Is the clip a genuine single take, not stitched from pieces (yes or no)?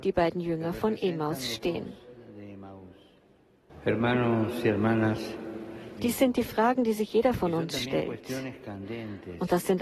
no